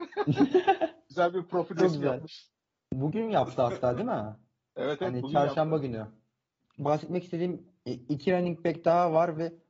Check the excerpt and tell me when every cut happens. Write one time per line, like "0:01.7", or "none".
none